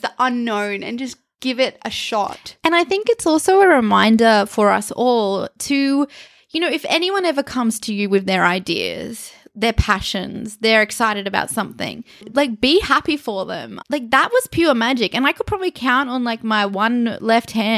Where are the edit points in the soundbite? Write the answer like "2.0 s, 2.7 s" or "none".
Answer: 12.2 s, 13.8 s